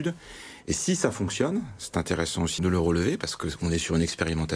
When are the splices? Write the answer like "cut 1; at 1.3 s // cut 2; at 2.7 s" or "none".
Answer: cut 1; at 2.6 s